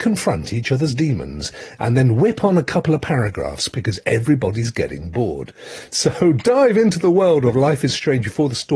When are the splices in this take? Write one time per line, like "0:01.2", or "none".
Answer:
none